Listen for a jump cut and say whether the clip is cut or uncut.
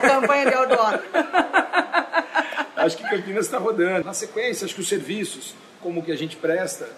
cut